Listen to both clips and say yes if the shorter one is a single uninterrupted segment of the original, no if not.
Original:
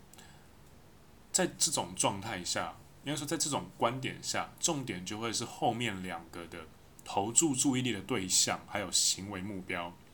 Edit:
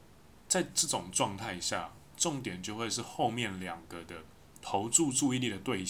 no